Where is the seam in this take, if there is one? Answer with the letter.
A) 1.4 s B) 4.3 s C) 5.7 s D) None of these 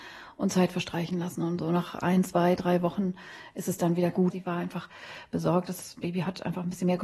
B